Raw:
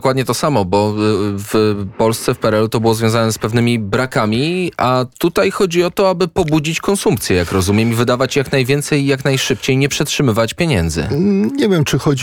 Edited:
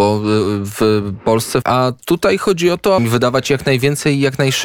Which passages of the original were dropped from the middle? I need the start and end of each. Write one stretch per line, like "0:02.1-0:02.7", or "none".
0:02.4-0:04.8
0:06.1-0:07.8